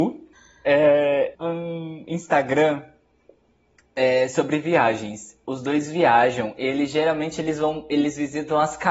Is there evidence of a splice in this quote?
yes; 1 cut; at 1.3 s

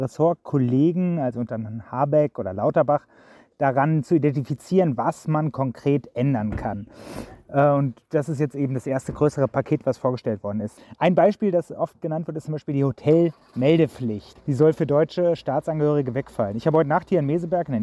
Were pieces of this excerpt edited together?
no; 0 cuts

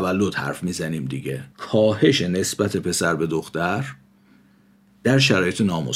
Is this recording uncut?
no; 1 cut; at 1.5 s

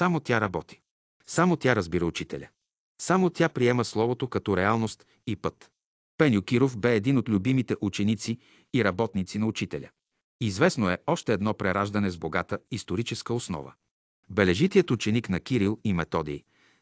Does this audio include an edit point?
no; 0 cuts

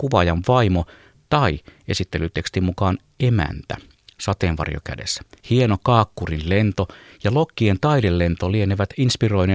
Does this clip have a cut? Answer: yes; 1 cut; at 5.4 s

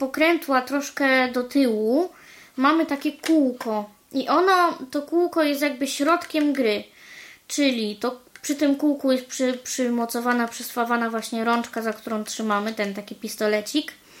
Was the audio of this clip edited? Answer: no; 0 cuts

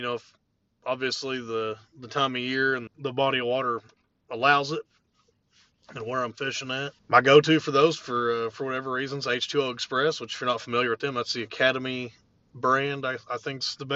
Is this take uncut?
no; 2 cuts; at 2.9 s, 7.0 s

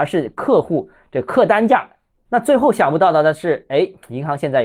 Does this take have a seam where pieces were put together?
yes; 1 cut; at 2.2 s

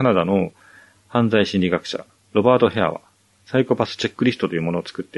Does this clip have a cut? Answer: no; 0 cuts

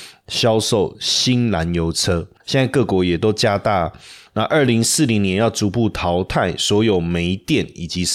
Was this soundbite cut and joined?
yes; 2 cuts; at 2.4 s, 4.3 s

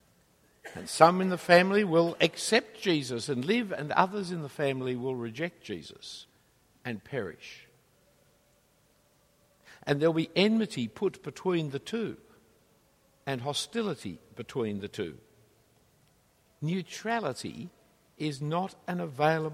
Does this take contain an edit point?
no; 0 cuts

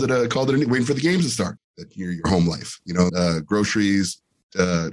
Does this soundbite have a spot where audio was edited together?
yes; 2 cuts; at 1.6 s, 3.1 s

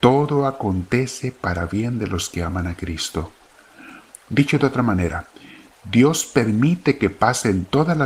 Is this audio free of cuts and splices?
yes; 0 cuts

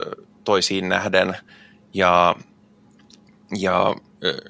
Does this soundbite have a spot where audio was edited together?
no; 0 cuts

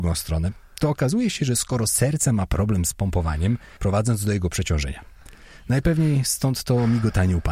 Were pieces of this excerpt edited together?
yes; 1 cut; at 3.8 s

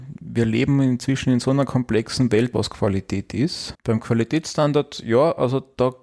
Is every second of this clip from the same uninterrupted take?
no; 2 cuts; at 2.5 s, 3.7 s

